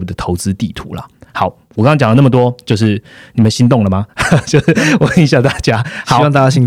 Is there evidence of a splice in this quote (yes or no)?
no